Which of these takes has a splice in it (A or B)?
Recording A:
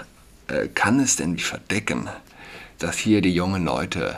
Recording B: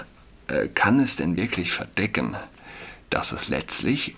A